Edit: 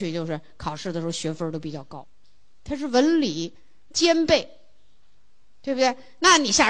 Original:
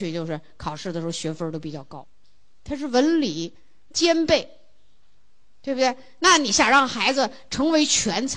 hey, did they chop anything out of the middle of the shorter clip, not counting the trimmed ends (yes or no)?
no